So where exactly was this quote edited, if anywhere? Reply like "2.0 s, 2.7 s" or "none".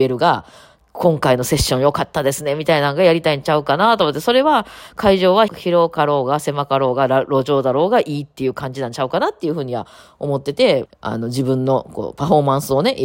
5.5 s, 10.9 s